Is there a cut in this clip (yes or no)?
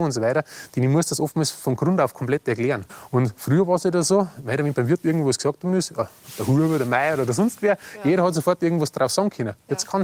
no